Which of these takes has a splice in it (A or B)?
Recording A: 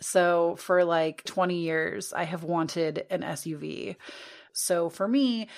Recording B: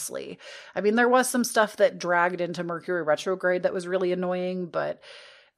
A